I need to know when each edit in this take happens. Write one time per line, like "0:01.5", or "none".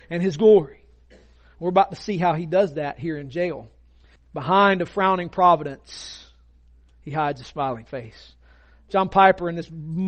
0:04.2